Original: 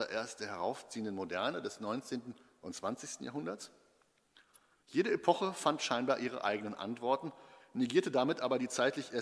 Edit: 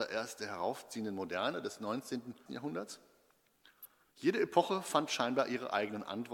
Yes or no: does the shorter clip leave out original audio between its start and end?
yes